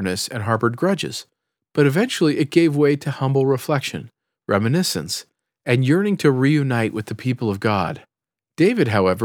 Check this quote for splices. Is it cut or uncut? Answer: uncut